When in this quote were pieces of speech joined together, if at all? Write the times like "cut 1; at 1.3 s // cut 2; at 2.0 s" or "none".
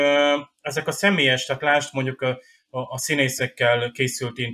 none